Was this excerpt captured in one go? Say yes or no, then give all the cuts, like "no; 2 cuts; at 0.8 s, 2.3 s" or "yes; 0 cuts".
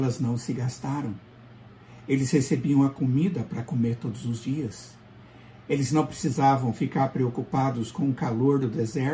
yes; 0 cuts